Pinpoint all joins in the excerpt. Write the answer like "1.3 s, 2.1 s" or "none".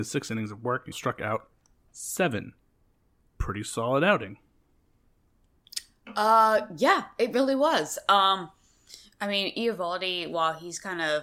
0.9 s